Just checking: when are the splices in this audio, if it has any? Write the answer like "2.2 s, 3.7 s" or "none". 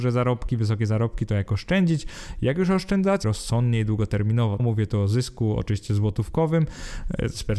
3.2 s, 4.6 s